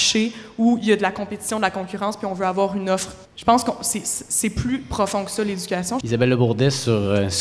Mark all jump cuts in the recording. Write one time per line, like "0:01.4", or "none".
0:03.2
0:06.0